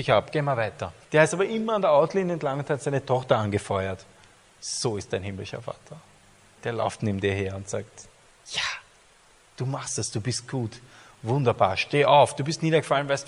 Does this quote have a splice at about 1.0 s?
yes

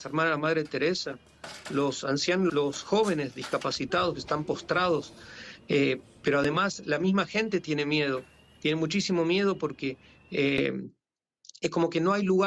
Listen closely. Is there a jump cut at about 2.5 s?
yes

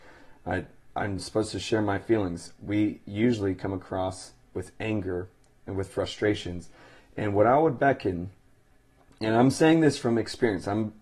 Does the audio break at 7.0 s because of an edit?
no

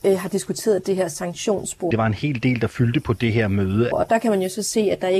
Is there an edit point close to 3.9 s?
yes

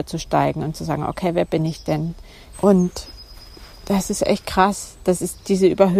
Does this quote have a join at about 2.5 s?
yes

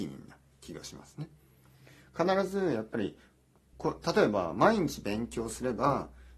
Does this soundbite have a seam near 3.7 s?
yes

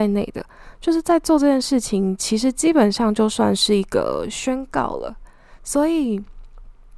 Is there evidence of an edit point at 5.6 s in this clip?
no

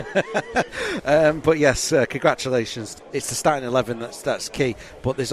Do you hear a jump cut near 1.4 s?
no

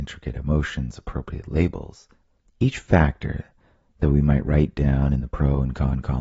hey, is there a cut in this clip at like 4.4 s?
no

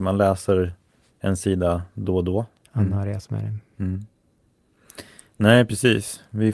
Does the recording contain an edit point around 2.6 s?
yes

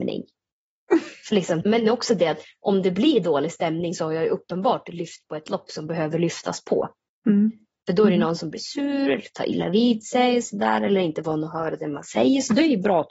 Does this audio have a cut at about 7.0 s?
no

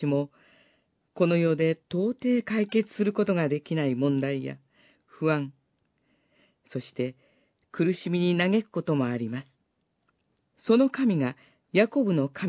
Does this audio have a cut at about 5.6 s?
no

